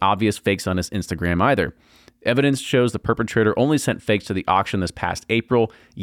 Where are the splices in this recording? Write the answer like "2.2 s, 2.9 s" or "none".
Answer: none

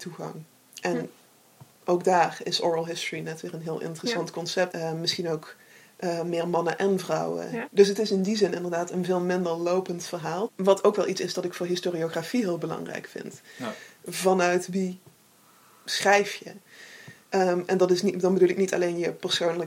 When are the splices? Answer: 4.7 s, 7.7 s, 10.5 s

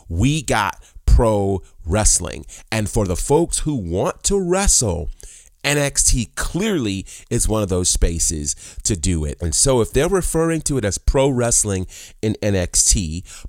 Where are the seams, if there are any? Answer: 9.4 s

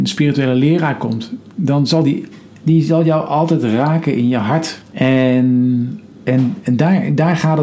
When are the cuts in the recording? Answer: 1.5 s, 4.9 s

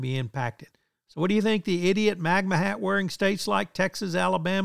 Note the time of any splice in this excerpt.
none

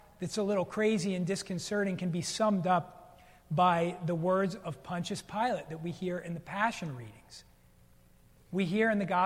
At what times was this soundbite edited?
8.4 s

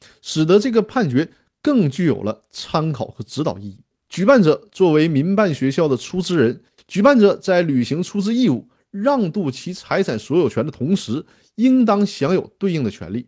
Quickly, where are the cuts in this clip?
4.0 s, 6.8 s

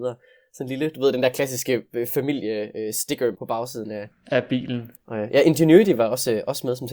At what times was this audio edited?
3.3 s, 5.0 s

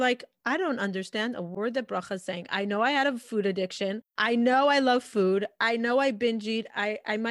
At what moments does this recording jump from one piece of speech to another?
4.1 s

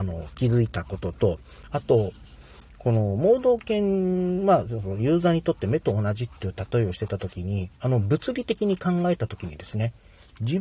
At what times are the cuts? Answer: none

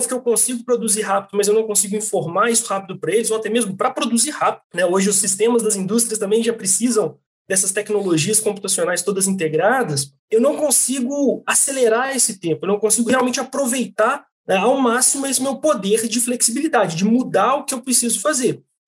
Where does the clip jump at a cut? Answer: 4.6 s

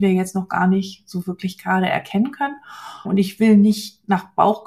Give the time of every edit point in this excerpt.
3.0 s

